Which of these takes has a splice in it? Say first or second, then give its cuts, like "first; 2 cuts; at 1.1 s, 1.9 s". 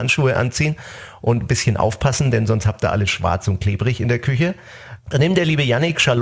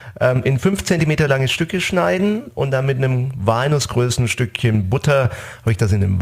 first; 1 cut; at 5.0 s